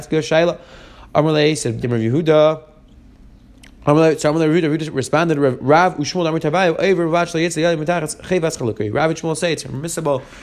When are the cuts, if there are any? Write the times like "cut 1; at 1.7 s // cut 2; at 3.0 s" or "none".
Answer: cut 1; at 1.8 s